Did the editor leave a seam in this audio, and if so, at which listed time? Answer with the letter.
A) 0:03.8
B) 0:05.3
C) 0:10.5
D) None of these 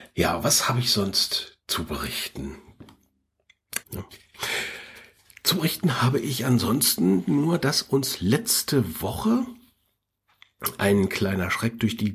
A